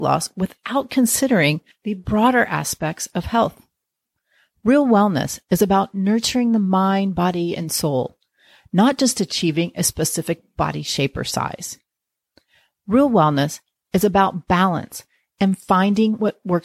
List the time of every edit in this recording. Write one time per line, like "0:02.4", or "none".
none